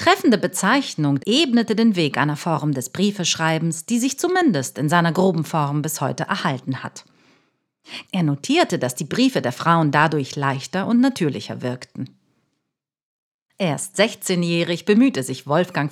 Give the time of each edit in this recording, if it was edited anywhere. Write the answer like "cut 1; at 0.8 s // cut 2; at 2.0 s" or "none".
cut 1; at 1.2 s // cut 2; at 8.0 s